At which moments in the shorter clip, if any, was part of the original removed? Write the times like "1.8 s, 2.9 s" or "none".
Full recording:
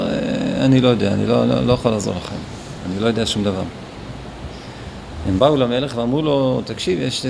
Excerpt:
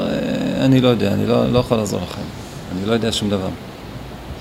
1.5 s